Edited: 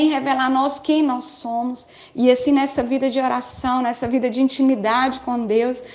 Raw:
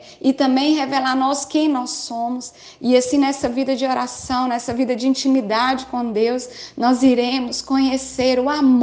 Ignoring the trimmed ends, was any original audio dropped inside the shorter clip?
no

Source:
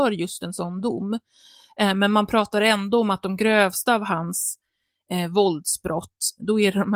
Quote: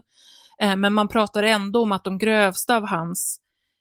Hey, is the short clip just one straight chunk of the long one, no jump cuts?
yes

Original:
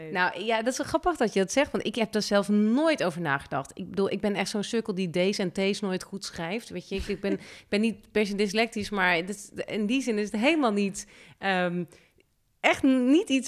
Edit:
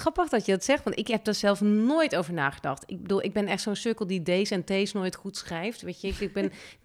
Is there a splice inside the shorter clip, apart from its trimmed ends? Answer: no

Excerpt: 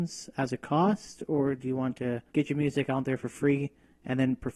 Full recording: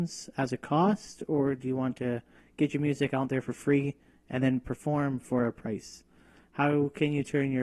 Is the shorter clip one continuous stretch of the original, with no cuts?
no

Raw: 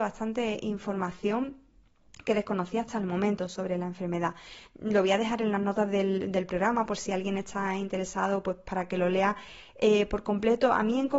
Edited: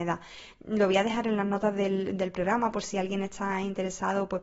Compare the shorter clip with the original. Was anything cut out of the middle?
no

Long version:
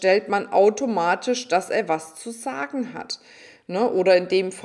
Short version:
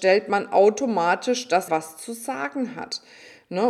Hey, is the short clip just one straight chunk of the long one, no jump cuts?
no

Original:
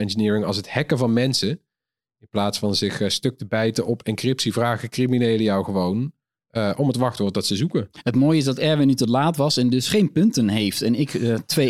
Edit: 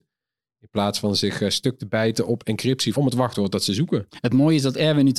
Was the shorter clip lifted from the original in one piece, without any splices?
no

